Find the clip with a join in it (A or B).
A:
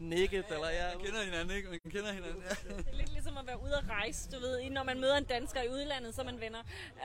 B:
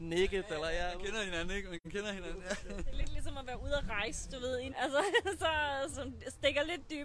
B